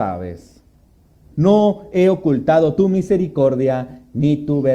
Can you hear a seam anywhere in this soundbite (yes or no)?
yes